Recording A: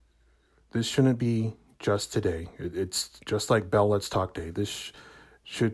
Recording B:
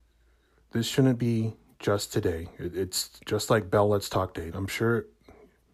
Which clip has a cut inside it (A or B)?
B